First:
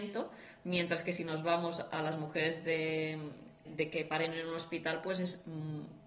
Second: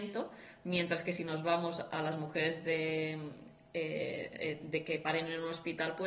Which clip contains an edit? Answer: first; 1 cut; at 3.6 s

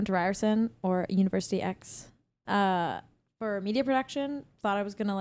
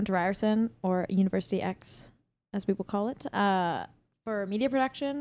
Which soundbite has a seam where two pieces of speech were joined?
first; 1 cut; at 2.4 s

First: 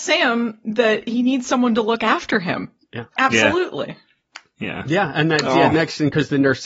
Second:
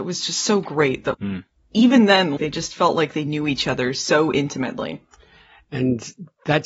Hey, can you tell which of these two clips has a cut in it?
second; 2 cuts; at 1.1 s, 2.4 s

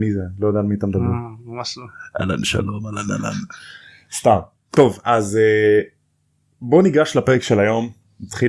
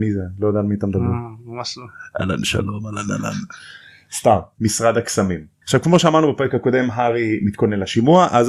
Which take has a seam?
second; 2 cuts; at 4.5 s, 5.6 s

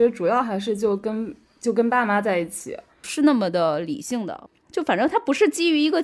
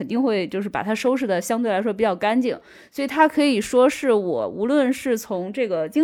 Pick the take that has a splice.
first; 1 cut; at 3.0 s

